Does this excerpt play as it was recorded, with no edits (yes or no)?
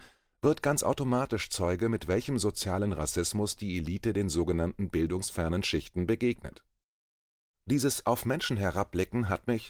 yes